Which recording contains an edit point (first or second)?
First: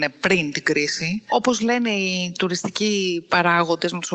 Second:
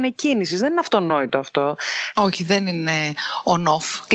second